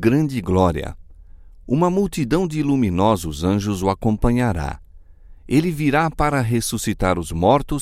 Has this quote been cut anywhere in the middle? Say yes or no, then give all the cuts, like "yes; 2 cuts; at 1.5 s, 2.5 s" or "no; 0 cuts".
no; 0 cuts